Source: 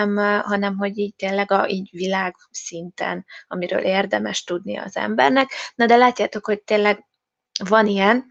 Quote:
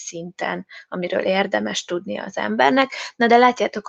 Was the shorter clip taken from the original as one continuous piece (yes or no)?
yes